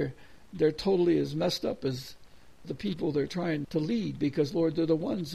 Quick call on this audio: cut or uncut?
cut